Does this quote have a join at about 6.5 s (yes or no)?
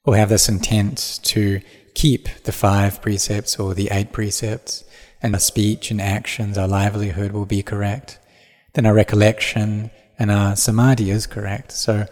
no